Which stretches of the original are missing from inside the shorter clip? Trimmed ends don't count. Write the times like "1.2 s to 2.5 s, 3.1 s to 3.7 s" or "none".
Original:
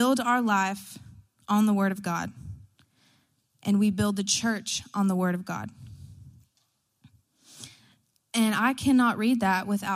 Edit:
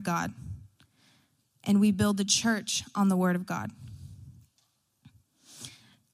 none